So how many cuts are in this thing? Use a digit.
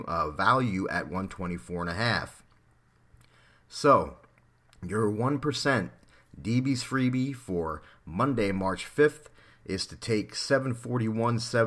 0